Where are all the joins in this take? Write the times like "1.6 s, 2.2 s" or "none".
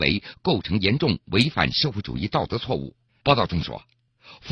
3.2 s